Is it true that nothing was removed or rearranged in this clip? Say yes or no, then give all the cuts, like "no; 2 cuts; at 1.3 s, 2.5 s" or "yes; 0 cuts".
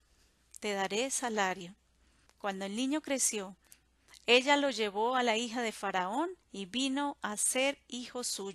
no; 2 cuts; at 2.3 s, 6.4 s